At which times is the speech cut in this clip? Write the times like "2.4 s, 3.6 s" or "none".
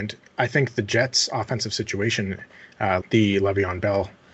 3.0 s

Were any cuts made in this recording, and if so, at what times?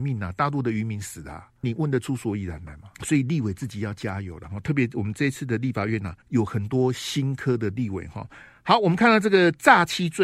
1.6 s, 2.9 s, 6.2 s

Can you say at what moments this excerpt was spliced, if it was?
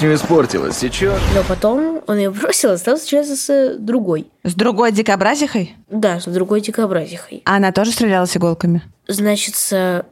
8.9 s

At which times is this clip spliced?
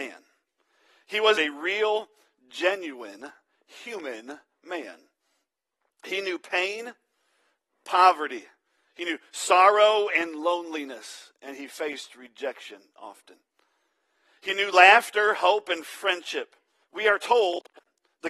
1.4 s, 16.8 s

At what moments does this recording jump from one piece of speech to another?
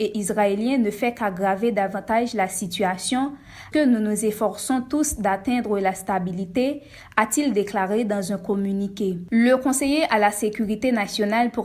3.7 s, 9.3 s

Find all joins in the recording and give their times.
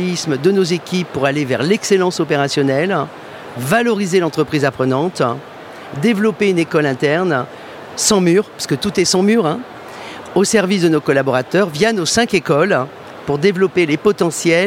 3.5 s

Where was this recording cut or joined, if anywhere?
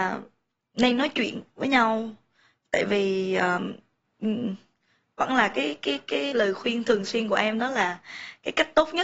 6.3 s

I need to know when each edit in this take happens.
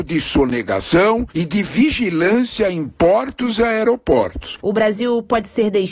4.6 s

